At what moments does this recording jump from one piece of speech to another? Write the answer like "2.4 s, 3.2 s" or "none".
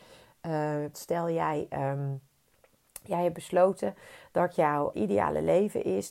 0.9 s, 4.9 s